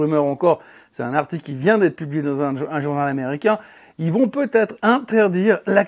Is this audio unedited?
yes; 0 cuts

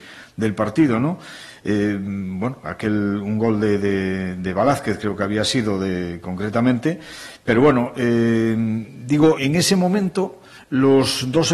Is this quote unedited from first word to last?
no; 1 cut; at 9.4 s

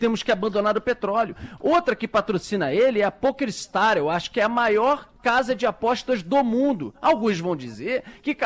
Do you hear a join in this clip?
no; 0 cuts

